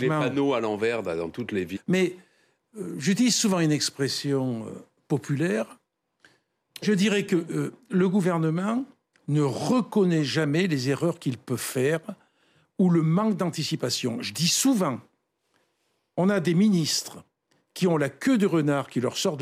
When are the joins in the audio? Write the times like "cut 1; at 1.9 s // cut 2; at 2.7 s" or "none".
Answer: cut 1; at 1.8 s // cut 2; at 6.8 s